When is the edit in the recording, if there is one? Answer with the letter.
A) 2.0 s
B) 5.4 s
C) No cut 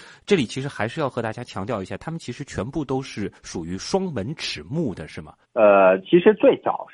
B